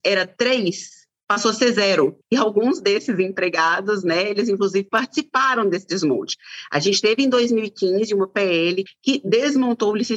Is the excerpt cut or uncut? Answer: cut